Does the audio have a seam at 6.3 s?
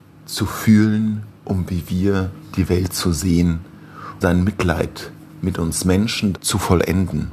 yes; 2 cuts; at 4.2 s, 6.3 s

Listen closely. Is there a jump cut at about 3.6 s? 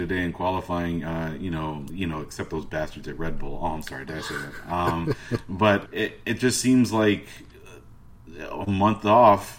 no; 2 cuts; at 1.9 s, 5.9 s

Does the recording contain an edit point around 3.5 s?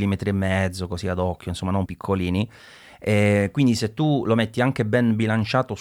no; 1 cut; at 1.9 s

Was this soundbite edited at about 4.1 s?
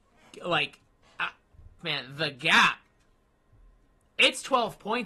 no; 1 cut; at 1.8 s

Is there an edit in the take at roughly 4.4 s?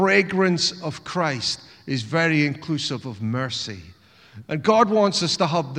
yes; 1 cut; at 4.4 s

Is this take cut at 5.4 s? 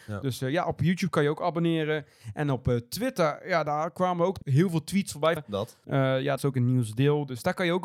yes; 2 cuts; at 5.4 s, 6.4 s

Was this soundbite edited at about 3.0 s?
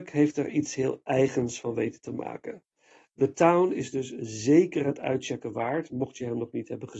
no; 0 cuts

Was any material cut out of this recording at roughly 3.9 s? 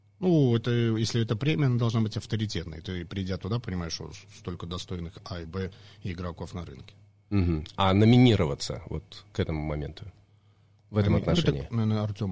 no; 1 cut; at 5.4 s

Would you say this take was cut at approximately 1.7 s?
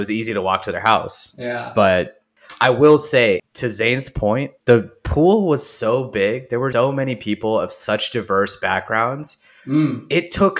no; 3 cuts; at 3.4 s, 4.6 s, 6.7 s

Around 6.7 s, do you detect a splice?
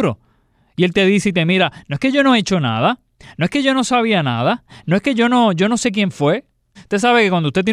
yes; 1 cut; at 6.7 s

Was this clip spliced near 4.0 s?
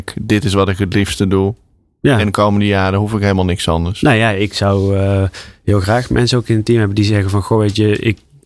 no; 0 cuts

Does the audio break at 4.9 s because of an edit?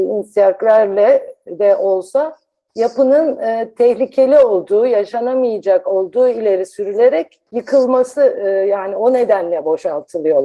no; 1 cut; at 7.5 s

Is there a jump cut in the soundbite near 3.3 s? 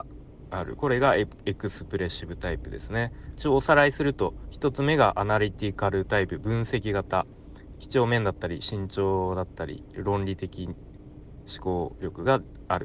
yes; 1 cut; at 3.3 s

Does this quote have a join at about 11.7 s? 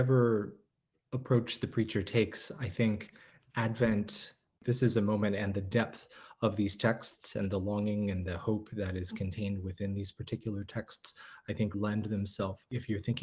yes; 2 cuts; at 4.6 s, 11.7 s

